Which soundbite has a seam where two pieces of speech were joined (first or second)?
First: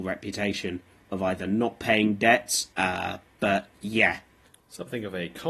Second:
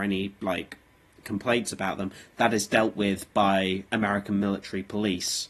first